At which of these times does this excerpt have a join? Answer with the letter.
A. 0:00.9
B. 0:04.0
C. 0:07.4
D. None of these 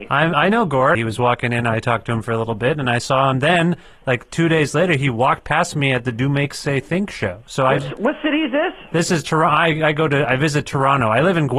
A